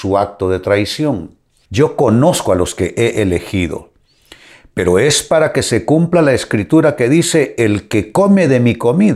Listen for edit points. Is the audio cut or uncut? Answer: cut